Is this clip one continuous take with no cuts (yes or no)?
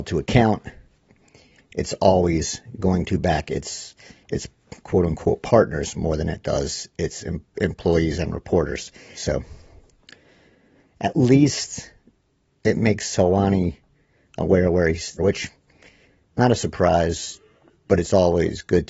no